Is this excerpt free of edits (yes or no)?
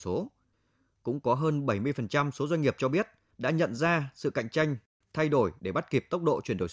yes